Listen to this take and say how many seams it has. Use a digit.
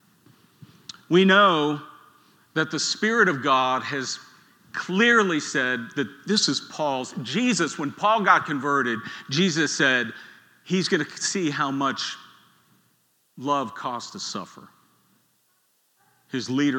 0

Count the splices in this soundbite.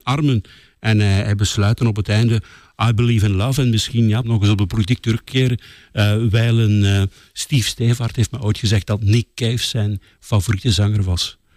1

